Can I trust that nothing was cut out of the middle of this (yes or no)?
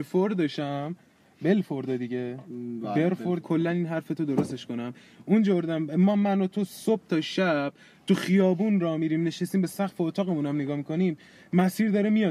no